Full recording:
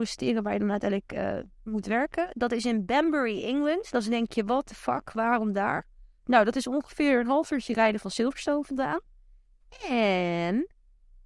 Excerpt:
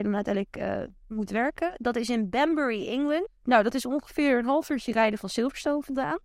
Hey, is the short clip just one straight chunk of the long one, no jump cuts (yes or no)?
no